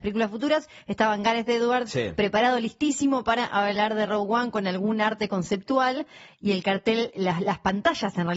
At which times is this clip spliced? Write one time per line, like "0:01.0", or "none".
none